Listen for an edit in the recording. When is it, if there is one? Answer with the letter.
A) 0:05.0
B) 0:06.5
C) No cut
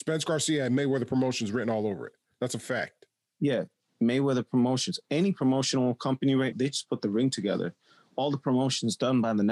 B